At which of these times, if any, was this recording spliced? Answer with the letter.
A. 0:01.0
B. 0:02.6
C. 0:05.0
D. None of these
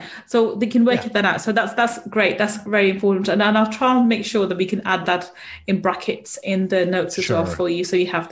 D